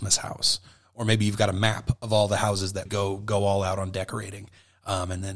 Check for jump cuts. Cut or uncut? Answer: cut